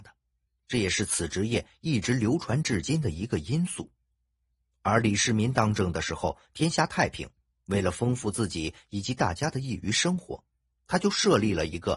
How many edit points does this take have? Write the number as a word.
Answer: zero